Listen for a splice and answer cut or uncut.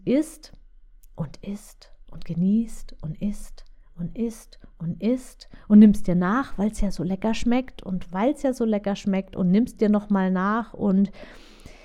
uncut